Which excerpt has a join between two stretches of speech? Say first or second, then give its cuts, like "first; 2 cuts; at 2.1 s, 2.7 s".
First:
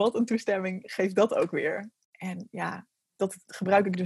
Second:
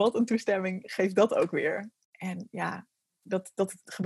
first; 1 cut; at 3.2 s